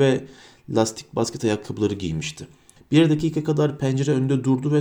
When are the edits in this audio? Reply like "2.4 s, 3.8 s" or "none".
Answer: 2.8 s